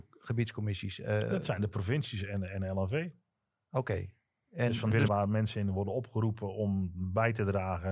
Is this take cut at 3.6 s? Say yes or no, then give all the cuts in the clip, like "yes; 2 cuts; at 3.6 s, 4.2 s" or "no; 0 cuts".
no; 1 cut; at 5.1 s